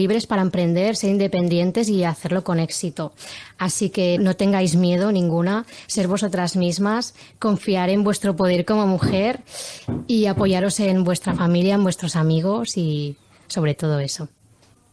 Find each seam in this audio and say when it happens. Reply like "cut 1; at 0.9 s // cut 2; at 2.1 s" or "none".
cut 1; at 4.2 s